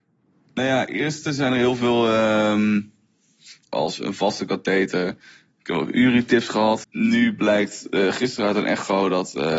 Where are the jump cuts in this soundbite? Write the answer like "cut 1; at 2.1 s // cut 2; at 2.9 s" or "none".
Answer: cut 1; at 3.7 s // cut 2; at 6.8 s